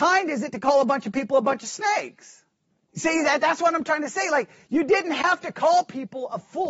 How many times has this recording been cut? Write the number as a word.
one